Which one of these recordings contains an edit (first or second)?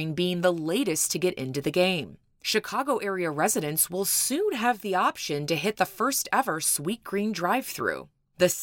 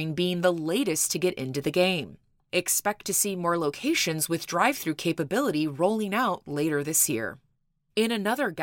second